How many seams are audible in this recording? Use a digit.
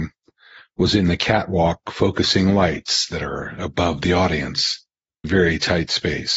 1